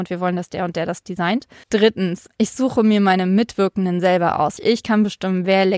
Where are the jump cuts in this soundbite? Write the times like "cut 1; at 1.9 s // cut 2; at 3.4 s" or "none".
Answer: cut 1; at 1.6 s // cut 2; at 4.6 s